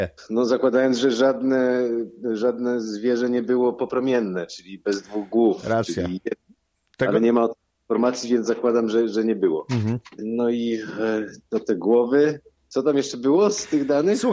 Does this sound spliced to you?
no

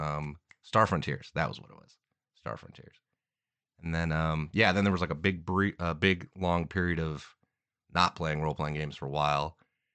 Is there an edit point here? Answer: no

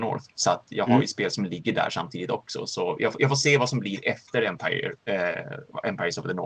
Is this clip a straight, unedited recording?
yes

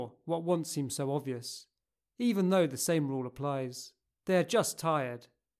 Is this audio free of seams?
no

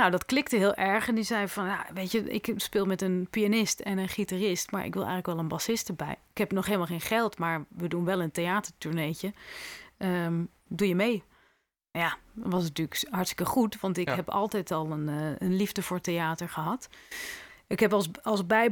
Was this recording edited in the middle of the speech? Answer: yes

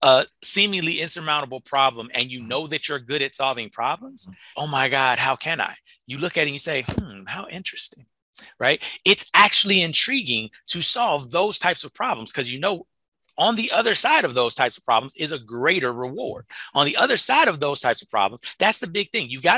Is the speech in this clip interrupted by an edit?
yes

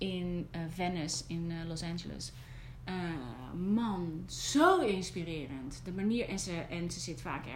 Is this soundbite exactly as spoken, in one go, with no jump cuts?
yes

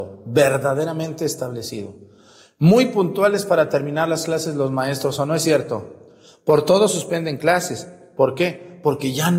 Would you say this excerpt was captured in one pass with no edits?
yes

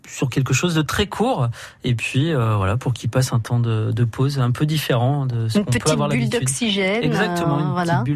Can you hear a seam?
no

